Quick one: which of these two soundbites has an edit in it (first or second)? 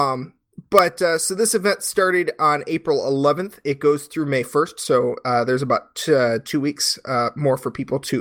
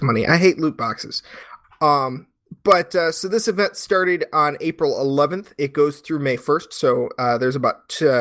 second